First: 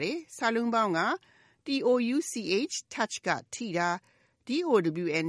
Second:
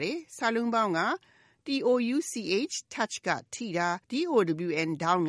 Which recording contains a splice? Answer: second; 1 cut; at 4.0 s

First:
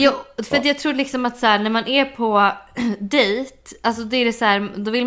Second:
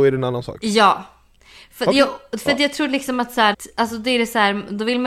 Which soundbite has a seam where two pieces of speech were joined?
second; 1 cut; at 3.5 s

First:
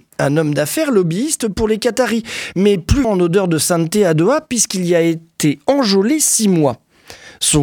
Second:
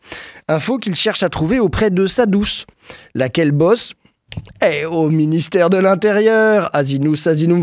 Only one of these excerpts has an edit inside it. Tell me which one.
first; 1 cut; at 3.0 s

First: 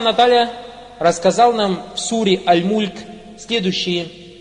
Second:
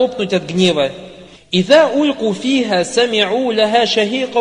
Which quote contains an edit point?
second; 1 cut; at 1.4 s

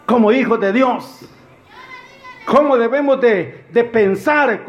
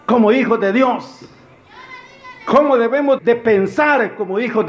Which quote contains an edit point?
second; 1 cut; at 3.2 s

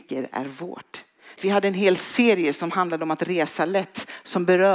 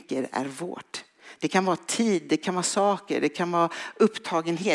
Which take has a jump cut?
first; 1 cut; at 1.4 s

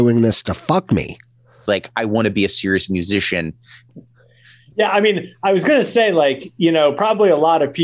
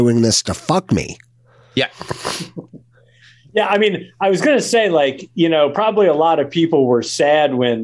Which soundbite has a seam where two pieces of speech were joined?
first; 2 cuts; at 1.7 s, 3.9 s

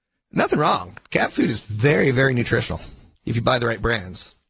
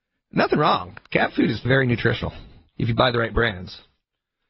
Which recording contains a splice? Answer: second; 1 cut; at 1.7 s

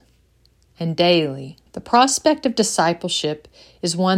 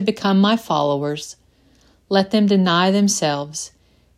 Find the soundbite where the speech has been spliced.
first; 1 cut; at 1.7 s

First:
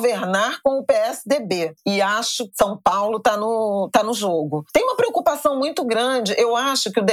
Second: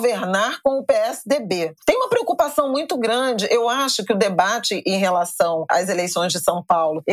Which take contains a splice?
second; 1 cut; at 1.8 s

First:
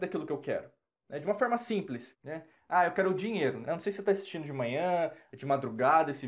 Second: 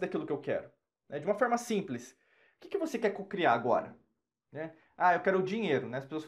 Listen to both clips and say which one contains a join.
first; 3 cuts; at 2.1 s, 3.6 s, 5.3 s

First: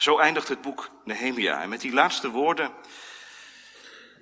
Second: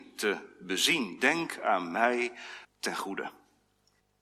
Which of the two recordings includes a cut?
second; 1 cut; at 2.6 s

